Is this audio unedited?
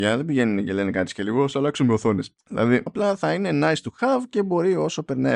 no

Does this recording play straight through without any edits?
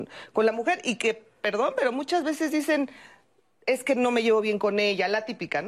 yes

